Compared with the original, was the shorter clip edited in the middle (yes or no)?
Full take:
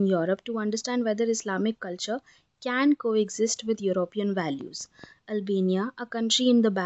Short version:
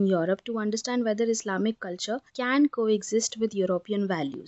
yes